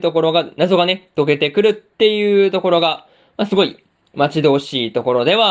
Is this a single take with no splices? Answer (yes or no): yes